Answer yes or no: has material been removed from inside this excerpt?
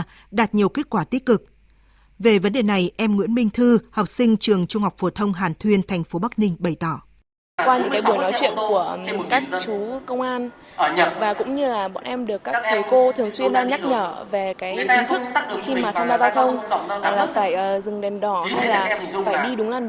yes